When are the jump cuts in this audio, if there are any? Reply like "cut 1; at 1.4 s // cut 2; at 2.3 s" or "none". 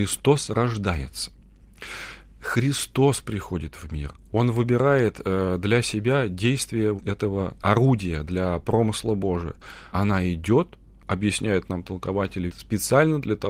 cut 1; at 7.0 s // cut 2; at 9.9 s // cut 3; at 12.5 s